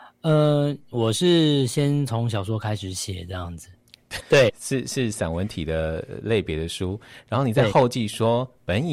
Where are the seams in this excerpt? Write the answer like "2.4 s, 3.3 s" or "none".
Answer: 4.2 s